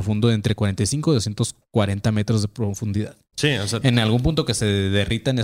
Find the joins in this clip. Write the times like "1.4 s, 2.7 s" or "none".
3.3 s